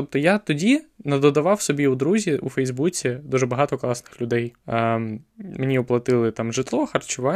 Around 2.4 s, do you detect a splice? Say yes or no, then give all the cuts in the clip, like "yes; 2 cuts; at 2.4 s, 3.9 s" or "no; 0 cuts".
no; 1 cut; at 4.6 s